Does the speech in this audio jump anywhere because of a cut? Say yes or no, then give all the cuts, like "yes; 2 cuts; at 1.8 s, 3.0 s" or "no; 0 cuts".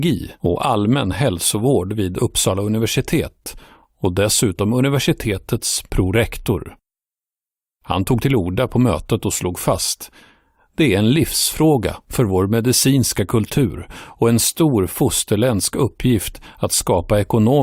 no; 0 cuts